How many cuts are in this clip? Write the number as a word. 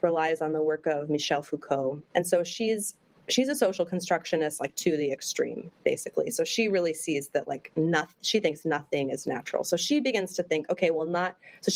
one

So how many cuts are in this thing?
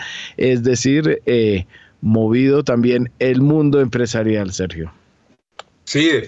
zero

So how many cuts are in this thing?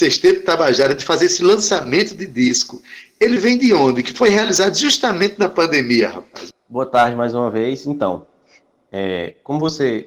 one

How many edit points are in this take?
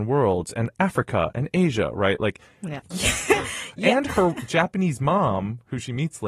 one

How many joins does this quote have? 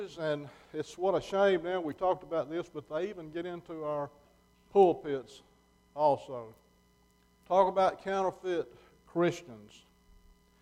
one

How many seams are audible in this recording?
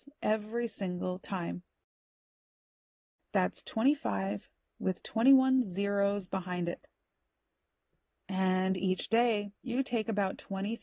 two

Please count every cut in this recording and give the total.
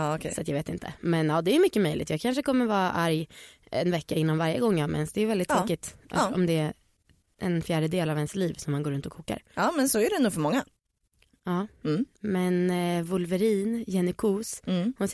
zero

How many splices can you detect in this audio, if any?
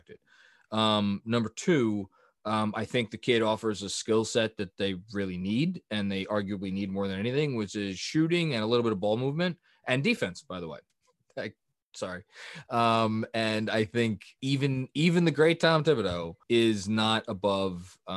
three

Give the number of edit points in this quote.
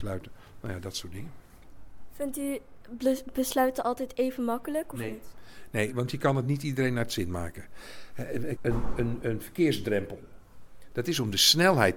one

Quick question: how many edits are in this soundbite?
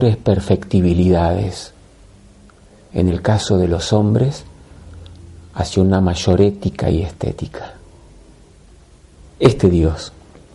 one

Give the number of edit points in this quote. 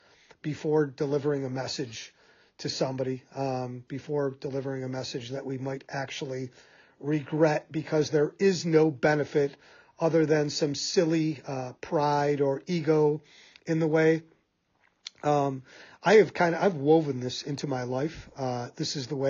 zero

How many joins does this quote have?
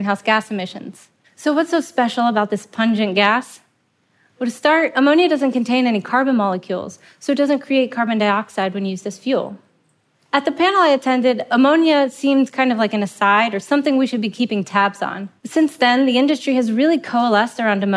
three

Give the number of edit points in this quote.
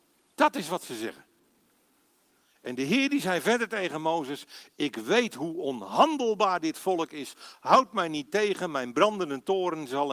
zero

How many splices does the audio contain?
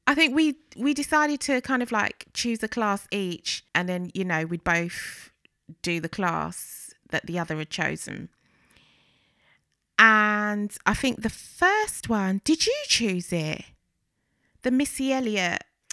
one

